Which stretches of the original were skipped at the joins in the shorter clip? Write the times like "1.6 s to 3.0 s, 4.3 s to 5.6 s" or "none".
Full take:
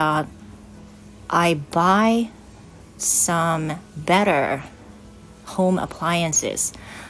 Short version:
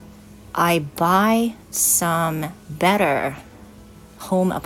2.4 s to 2.9 s